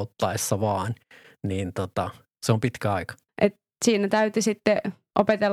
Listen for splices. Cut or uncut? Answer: cut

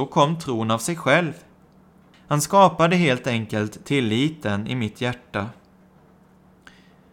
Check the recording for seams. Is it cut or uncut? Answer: cut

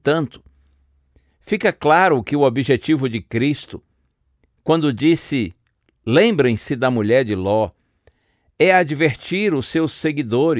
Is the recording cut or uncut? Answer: uncut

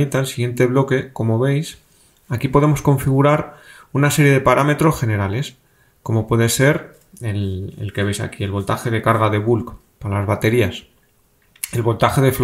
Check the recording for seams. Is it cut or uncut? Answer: uncut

